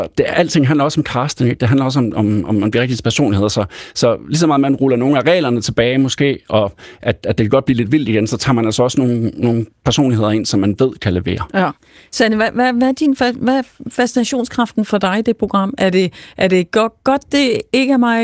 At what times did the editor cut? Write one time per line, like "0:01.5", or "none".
none